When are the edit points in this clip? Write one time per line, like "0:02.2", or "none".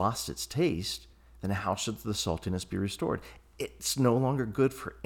none